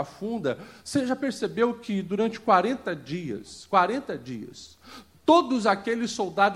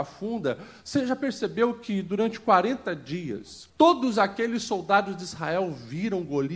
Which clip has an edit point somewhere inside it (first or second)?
second